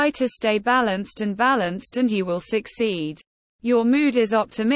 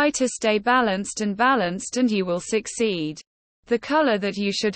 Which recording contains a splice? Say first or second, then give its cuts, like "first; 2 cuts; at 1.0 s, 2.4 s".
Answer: first; 1 cut; at 3.4 s